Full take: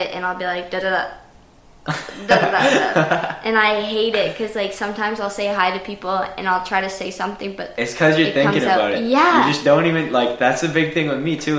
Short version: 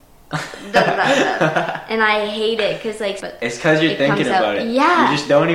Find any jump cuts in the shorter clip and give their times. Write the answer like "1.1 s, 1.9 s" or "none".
3.2 s